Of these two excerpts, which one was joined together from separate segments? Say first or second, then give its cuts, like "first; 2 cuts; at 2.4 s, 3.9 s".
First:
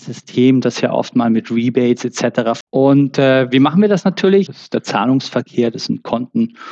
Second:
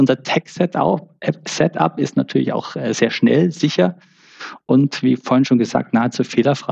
first; 2 cuts; at 2.6 s, 4.5 s